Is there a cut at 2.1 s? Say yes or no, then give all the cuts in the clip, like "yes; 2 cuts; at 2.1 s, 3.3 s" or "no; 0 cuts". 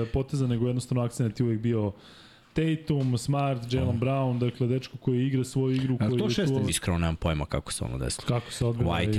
no; 2 cuts; at 6.7 s, 8.2 s